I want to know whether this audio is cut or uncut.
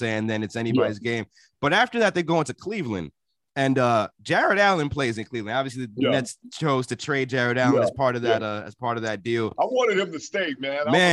uncut